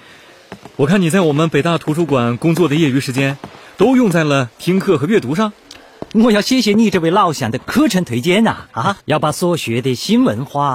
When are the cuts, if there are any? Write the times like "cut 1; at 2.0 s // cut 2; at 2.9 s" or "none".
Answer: cut 1; at 6.1 s // cut 2; at 9.0 s